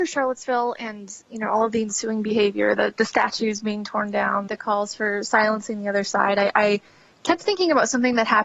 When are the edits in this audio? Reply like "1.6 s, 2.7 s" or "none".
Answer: 4.5 s

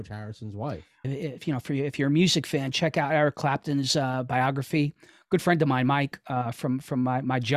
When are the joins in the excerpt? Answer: 1.0 s

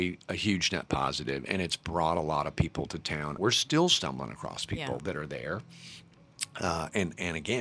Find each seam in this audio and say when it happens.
3.4 s

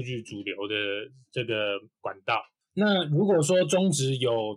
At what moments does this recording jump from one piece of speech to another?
none

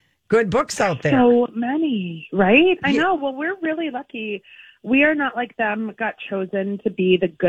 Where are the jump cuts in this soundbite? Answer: none

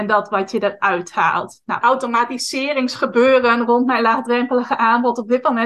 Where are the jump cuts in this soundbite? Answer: 1.8 s

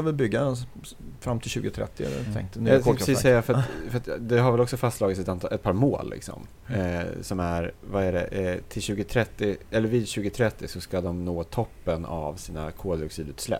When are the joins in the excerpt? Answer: none

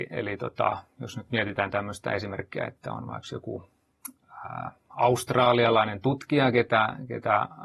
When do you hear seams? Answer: none

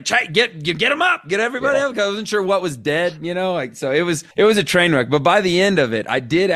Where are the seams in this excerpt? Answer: 4.3 s

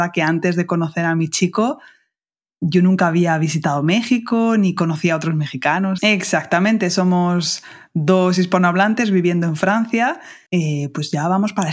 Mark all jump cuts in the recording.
6.0 s, 10.5 s

